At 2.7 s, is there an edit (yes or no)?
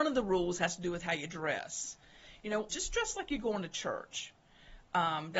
yes